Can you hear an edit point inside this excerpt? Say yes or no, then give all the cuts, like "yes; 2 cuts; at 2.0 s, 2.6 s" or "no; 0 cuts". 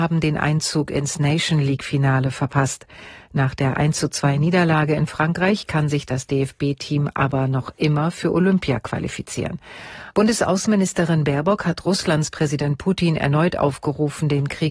yes; 1 cut; at 10.1 s